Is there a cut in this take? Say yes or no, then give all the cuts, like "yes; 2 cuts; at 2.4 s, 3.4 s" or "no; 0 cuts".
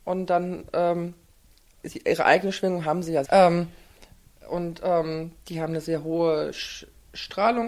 yes; 1 cut; at 3.3 s